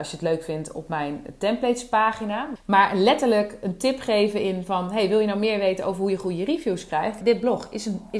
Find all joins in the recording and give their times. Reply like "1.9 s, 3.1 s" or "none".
2.6 s, 7.2 s